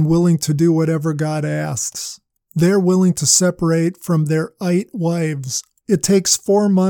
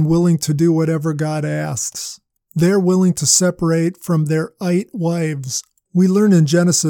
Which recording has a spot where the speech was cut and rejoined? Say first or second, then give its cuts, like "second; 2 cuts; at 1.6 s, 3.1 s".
first; 1 cut; at 5.8 s